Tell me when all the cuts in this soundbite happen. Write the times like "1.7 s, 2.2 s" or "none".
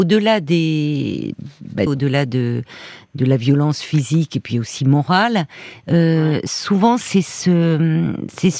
1.9 s